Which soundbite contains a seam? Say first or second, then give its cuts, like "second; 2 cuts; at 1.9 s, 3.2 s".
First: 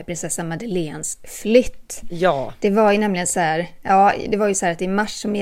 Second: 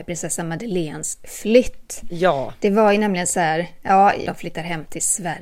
second; 1 cut; at 4.3 s